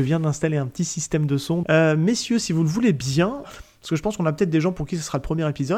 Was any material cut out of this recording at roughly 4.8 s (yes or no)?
no